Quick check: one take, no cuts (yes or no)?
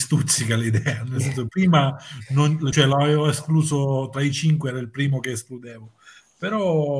yes